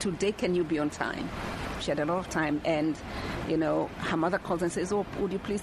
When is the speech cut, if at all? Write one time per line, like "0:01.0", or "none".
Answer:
0:01.8